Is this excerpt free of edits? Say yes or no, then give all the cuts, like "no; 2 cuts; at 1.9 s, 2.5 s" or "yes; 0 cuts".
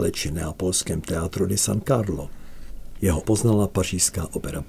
no; 1 cut; at 3.2 s